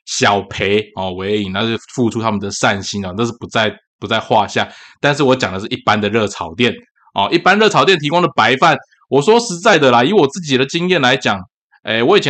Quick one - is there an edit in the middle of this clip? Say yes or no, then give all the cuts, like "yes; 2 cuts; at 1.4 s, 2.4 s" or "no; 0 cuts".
no; 0 cuts